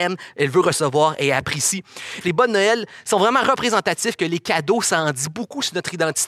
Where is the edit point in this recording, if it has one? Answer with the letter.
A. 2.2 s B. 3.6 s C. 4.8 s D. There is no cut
A